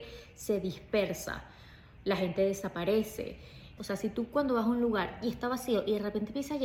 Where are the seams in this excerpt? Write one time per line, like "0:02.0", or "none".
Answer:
0:03.8

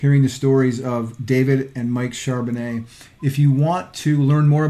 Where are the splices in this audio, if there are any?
none

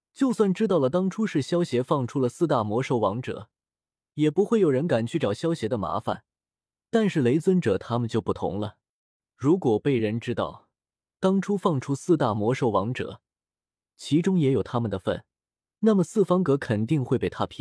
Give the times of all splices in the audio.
none

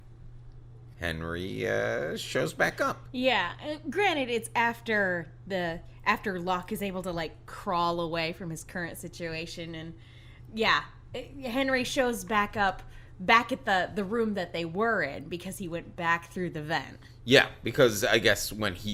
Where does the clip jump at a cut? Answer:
0:00.9

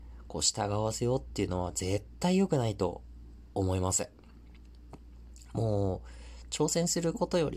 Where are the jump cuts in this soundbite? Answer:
none

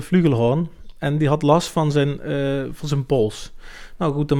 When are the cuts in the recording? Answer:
none

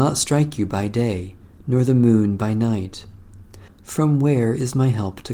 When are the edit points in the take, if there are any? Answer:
0:03.7

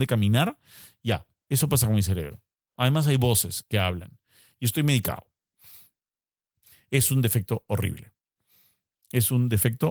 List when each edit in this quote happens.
none

